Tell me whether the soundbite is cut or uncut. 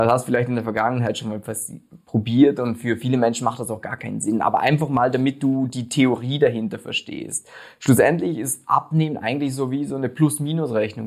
uncut